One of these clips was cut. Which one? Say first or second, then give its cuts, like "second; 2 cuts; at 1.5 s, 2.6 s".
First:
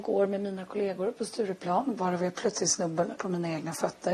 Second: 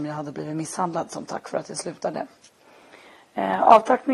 first; 1 cut; at 3.2 s